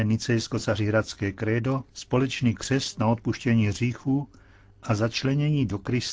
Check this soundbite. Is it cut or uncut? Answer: cut